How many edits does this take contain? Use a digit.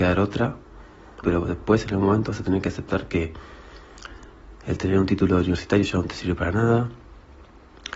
1